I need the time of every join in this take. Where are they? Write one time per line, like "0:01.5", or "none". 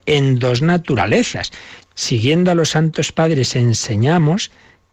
0:01.8